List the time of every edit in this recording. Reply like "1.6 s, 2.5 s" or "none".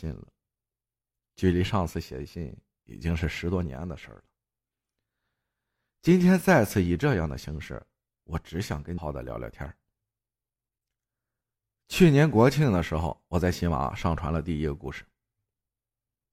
9.0 s